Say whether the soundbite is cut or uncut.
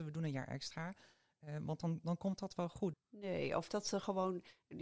cut